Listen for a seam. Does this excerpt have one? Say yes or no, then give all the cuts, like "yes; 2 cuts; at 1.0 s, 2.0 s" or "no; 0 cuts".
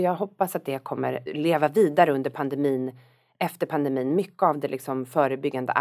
yes; 1 cut; at 1.3 s